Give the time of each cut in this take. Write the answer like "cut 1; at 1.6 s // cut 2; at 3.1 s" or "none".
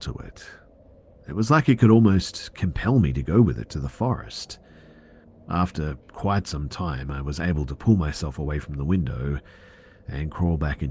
none